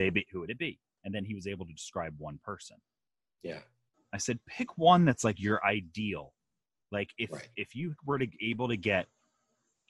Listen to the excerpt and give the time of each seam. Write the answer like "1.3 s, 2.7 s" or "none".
3.9 s